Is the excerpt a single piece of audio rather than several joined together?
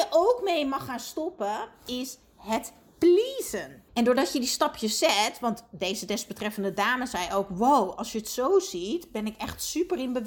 no; 1 cut; at 3.9 s

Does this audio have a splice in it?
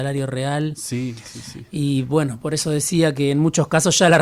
no; 0 cuts

